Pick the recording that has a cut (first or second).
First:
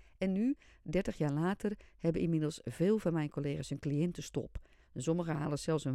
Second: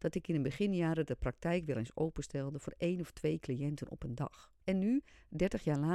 second